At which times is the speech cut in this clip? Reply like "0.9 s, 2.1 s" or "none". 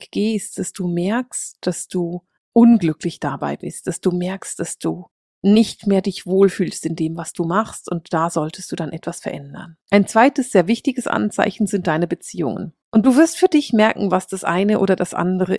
9.8 s, 12.8 s